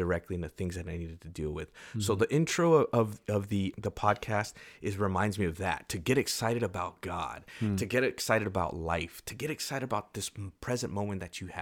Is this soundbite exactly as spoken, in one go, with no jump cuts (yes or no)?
no